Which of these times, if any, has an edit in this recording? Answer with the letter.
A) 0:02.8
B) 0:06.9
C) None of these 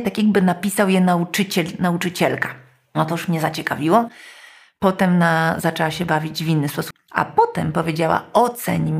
B